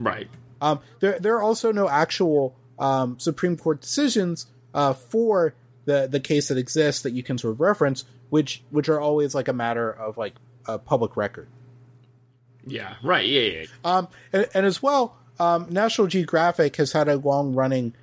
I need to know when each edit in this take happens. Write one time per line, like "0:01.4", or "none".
0:13.6